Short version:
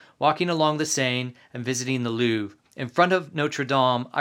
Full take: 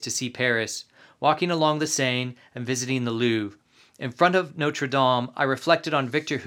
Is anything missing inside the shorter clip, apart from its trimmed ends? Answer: yes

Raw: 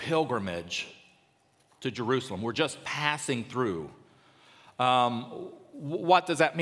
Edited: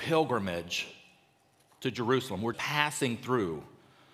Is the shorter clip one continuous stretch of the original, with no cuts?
no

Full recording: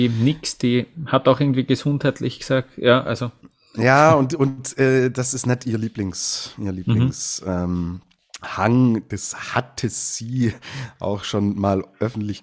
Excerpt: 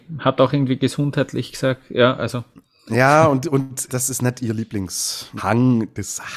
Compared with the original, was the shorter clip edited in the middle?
yes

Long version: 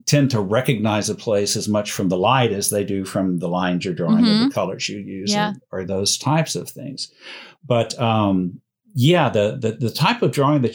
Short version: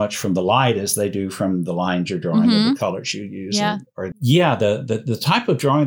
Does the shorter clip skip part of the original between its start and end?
yes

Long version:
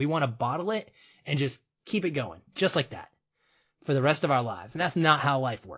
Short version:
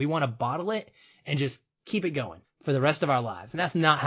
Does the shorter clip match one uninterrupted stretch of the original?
no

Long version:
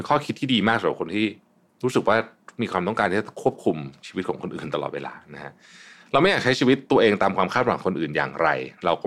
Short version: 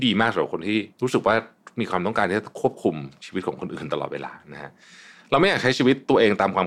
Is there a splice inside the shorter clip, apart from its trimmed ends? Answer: yes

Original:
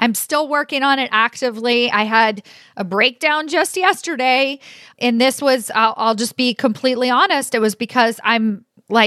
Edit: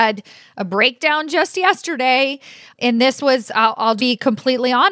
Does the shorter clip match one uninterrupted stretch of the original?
no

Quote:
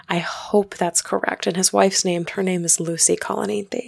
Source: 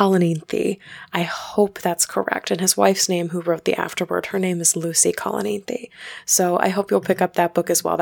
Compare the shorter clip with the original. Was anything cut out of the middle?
yes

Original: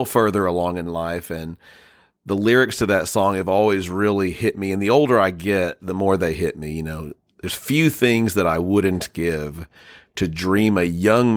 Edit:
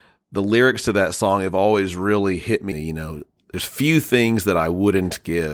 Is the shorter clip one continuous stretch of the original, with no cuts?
no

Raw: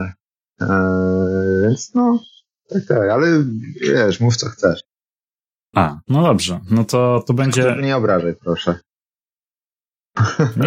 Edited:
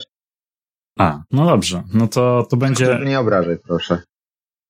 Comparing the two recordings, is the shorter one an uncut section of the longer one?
yes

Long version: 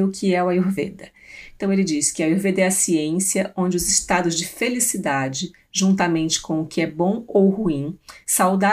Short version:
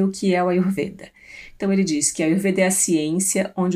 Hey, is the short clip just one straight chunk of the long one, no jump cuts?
yes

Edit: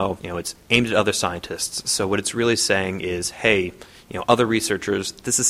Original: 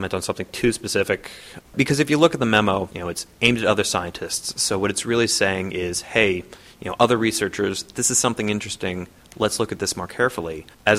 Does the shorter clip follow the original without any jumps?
yes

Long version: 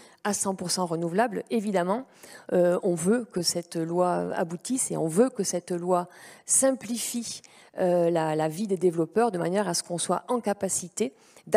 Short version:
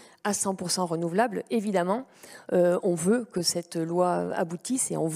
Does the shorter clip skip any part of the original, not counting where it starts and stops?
no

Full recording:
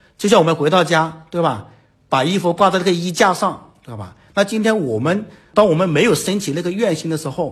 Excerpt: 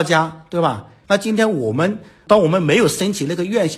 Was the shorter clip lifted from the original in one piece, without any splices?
no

